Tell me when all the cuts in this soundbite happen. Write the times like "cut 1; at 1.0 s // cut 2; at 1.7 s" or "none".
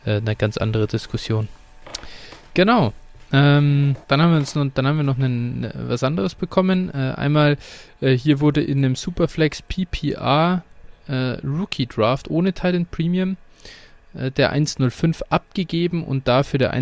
cut 1; at 4.0 s